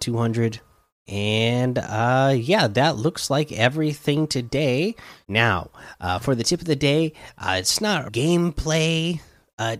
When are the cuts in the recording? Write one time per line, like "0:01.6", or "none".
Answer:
0:00.9
0:05.2
0:08.1